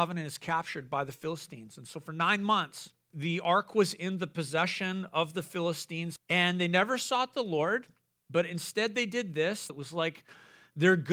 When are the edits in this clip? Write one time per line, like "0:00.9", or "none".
0:03.1
0:06.2
0:09.7